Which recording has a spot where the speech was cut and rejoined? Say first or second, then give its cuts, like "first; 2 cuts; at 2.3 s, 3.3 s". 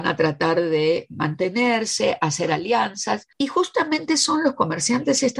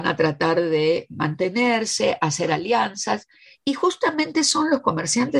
first; 1 cut; at 3.3 s